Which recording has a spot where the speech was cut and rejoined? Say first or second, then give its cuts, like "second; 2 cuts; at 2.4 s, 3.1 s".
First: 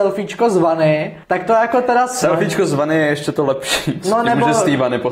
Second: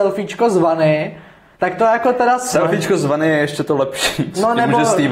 first; 1 cut; at 1.2 s